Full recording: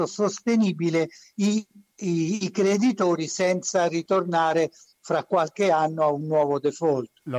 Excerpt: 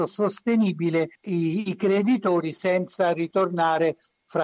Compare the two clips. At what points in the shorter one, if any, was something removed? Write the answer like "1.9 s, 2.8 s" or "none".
1.2 s

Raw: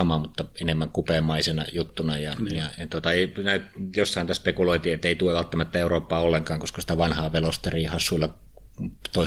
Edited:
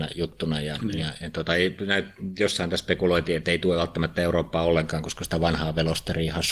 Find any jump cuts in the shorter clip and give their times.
none

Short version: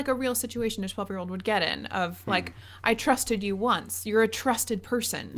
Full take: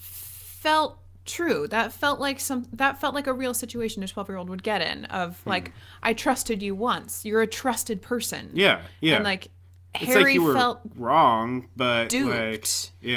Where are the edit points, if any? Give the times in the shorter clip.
none

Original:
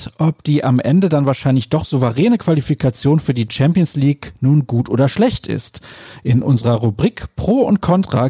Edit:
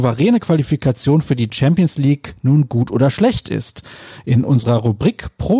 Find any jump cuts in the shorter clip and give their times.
none

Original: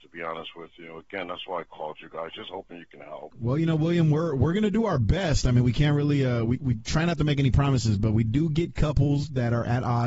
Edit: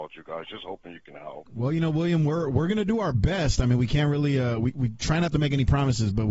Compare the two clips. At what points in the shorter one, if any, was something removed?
none

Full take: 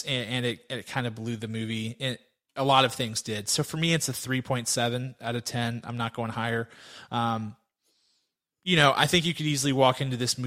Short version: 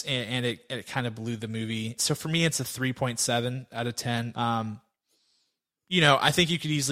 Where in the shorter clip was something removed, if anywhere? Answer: 2.0 s, 4.3 s

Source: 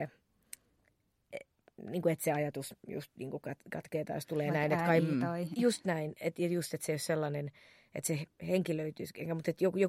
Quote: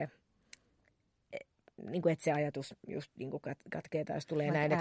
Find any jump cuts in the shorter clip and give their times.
none

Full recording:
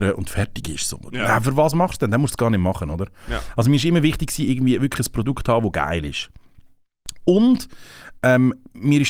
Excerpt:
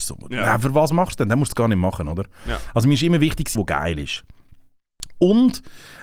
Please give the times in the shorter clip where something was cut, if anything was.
3.5 s

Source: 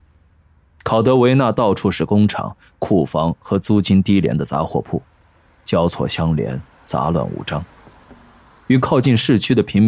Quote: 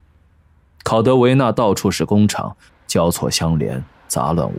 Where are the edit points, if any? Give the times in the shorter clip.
2.7 s

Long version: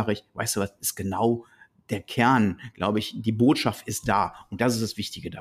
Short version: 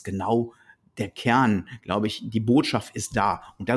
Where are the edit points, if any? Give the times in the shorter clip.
none

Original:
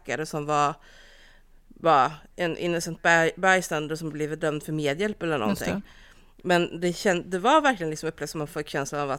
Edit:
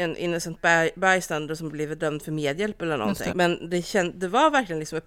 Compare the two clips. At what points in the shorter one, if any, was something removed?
3.3 s

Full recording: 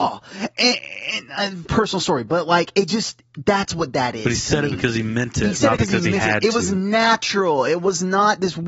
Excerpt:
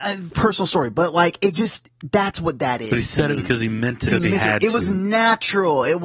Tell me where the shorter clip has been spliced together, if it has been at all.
4.1 s

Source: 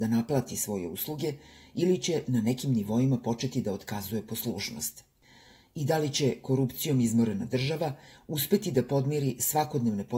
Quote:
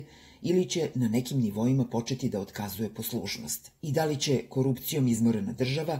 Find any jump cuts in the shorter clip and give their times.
3.8 s

